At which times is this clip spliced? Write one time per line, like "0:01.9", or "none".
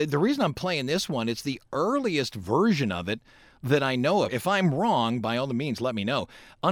0:04.3